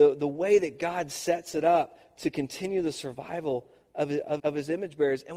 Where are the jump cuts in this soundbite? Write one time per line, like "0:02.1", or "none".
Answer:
0:04.4